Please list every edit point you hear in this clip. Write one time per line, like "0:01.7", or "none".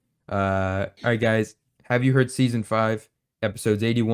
0:01.7